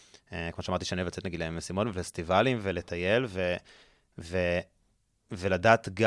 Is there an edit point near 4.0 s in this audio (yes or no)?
no